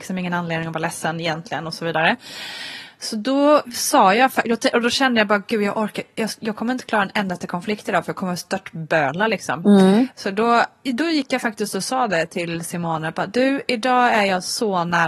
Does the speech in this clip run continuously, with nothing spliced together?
no; 1 cut; at 10.8 s

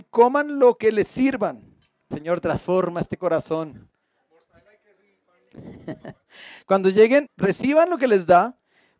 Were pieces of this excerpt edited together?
yes; 2 cuts; at 2.1 s, 7.3 s

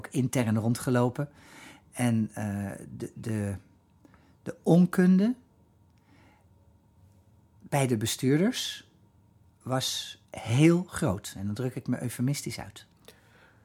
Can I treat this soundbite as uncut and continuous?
no; 1 cut; at 10.2 s

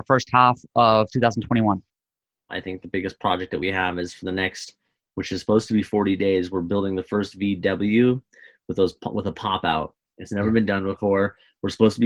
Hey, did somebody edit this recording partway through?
yes; 1 cut; at 2.5 s

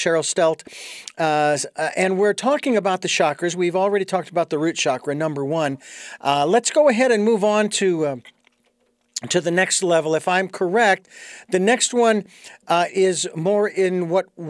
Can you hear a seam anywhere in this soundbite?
yes; 1 cut; at 12.9 s

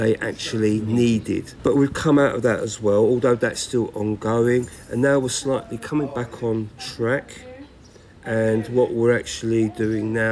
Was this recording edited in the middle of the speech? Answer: no; 0 cuts

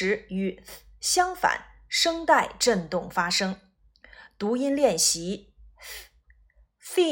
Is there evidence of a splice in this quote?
no; 0 cuts

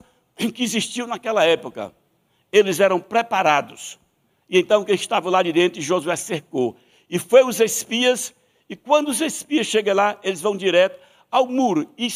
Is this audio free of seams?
yes; 0 cuts

